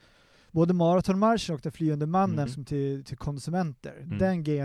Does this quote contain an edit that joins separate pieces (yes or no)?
yes